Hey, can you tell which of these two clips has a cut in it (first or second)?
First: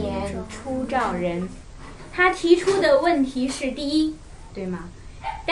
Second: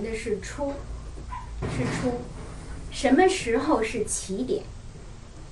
first